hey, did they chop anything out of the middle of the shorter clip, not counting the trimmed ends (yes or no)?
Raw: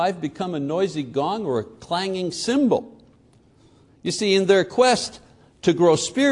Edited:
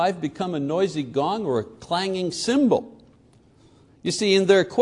no